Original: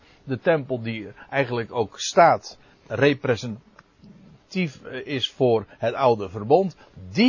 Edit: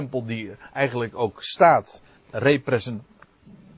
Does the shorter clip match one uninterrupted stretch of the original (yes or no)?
yes